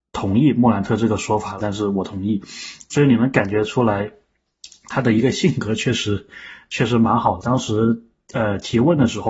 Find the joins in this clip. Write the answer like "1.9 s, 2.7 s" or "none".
1.6 s, 7.4 s